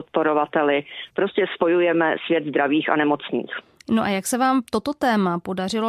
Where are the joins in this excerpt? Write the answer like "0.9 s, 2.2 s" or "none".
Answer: none